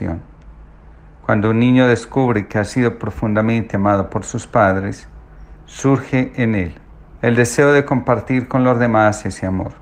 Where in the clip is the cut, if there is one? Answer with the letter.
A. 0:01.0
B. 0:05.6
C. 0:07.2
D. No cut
C